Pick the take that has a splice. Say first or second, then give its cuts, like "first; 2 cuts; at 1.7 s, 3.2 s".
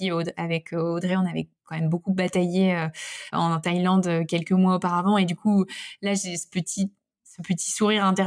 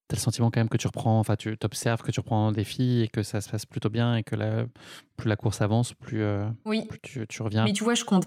first; 1 cut; at 3.3 s